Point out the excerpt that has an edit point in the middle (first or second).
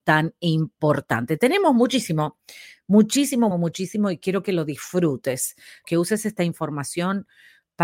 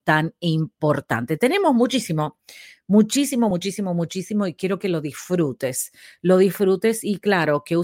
first